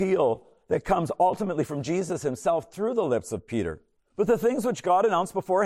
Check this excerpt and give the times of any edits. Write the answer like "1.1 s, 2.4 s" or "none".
4.0 s